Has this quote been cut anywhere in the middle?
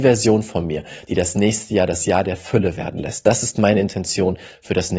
no; 0 cuts

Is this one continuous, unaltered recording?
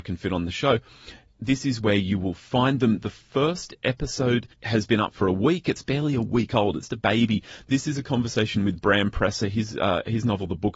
no; 2 cuts; at 4.5 s, 6.9 s

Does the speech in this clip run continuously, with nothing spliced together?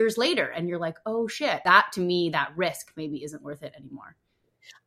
yes; 0 cuts

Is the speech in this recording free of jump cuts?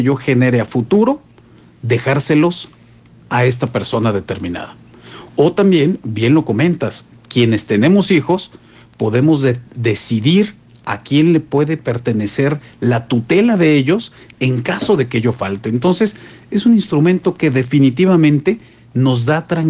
yes; 0 cuts

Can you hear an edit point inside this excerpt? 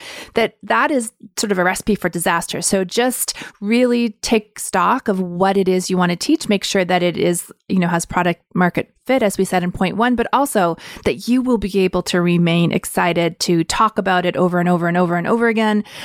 no; 0 cuts

